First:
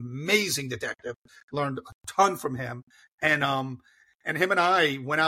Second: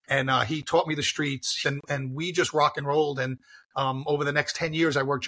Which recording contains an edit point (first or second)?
second